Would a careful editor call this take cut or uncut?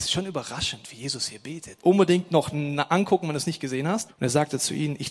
cut